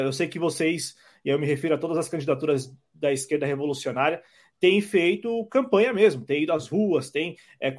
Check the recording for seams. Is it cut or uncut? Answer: uncut